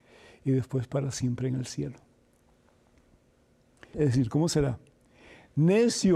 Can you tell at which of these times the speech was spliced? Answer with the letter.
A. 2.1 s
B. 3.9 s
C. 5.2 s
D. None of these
B